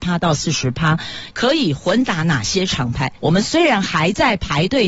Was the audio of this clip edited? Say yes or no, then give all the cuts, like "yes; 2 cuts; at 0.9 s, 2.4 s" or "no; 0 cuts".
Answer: yes; 2 cuts; at 1.3 s, 3.2 s